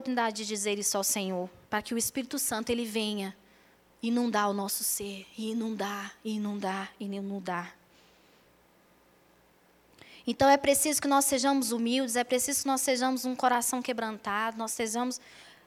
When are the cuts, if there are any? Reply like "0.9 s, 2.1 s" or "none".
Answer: 1.6 s